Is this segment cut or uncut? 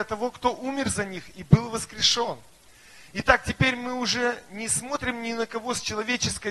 uncut